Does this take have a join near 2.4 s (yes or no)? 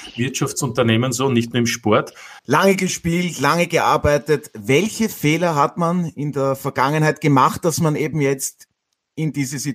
yes